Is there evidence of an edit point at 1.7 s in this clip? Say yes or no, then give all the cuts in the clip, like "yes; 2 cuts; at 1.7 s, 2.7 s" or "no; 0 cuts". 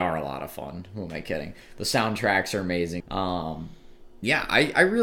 no; 1 cut; at 3.0 s